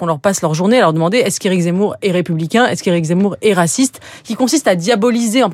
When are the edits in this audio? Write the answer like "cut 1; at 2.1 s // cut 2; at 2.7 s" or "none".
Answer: none